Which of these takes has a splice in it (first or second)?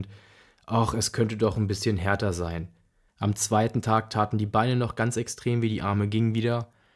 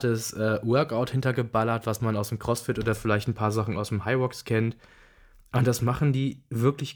first